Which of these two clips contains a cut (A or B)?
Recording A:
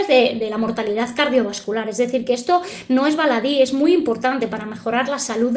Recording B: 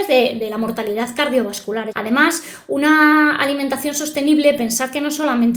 B